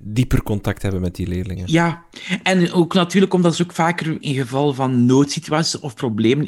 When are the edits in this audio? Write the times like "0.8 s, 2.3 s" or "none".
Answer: 4.2 s